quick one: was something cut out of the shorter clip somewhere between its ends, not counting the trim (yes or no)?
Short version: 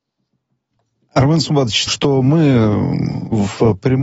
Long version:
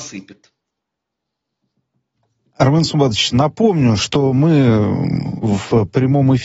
yes